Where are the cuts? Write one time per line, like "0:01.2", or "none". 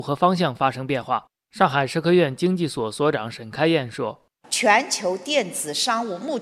none